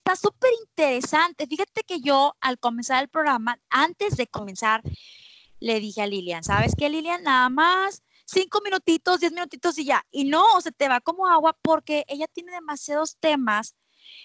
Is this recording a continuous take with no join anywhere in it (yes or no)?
yes